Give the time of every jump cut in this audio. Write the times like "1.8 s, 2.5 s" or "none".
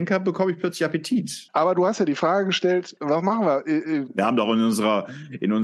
1.5 s, 4.1 s

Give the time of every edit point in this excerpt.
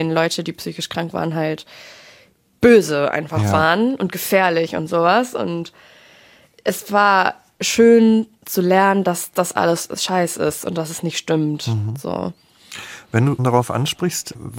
13.4 s

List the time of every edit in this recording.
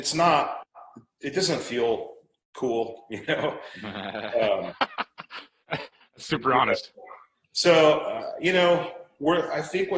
none

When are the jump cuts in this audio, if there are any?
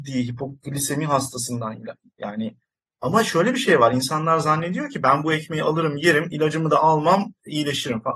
none

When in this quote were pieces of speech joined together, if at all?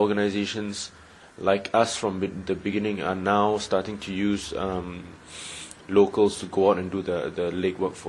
none

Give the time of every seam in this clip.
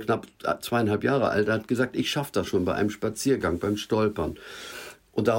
none

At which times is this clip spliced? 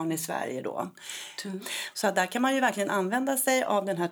1.4 s

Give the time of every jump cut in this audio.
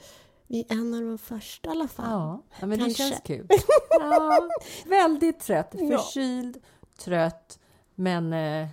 2.5 s, 4.8 s

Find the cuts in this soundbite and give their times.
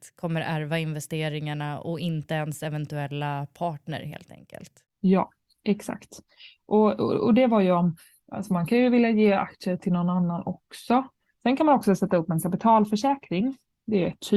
11.3 s

